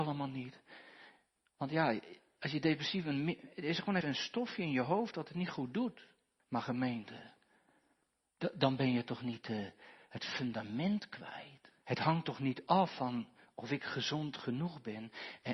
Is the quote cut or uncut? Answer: cut